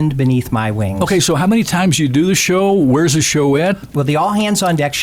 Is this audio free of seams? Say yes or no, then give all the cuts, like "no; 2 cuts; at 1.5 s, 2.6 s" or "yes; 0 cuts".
yes; 0 cuts